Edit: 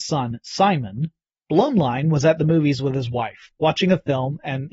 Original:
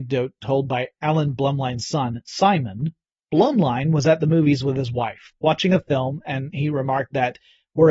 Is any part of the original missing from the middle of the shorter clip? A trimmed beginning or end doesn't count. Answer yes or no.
no